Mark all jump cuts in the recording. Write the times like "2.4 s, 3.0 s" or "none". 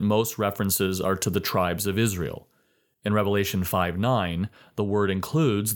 none